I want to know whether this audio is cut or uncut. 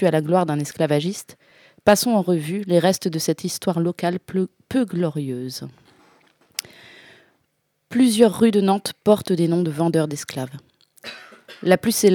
uncut